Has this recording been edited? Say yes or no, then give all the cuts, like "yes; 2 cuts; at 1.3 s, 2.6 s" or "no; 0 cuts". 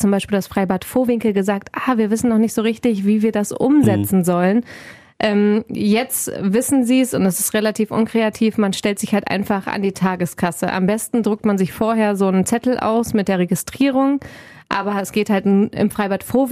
no; 0 cuts